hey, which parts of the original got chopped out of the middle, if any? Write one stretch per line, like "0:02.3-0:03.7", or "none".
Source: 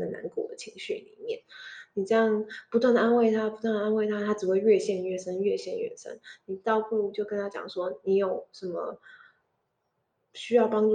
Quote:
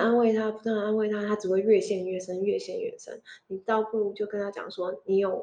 none